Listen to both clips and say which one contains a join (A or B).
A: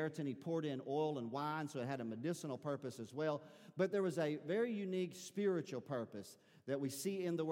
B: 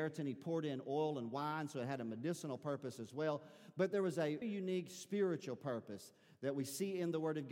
B